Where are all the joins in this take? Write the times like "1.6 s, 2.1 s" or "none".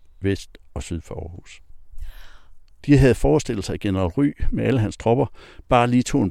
2.8 s